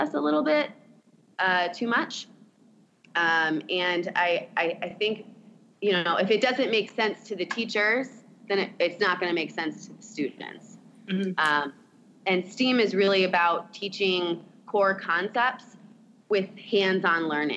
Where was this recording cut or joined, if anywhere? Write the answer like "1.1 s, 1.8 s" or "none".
none